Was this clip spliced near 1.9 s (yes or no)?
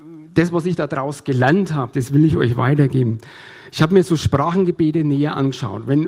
yes